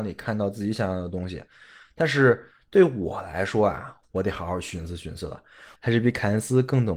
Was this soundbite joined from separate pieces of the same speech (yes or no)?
yes